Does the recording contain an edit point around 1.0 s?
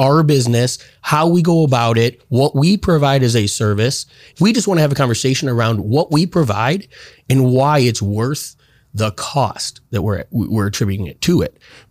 no; 1 cut; at 4.3 s

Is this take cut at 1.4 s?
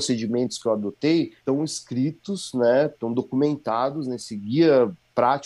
yes; 1 cut; at 1.4 s

